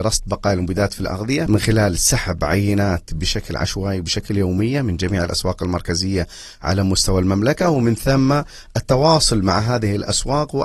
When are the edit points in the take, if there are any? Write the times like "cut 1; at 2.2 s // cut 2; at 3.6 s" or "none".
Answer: cut 1; at 1.5 s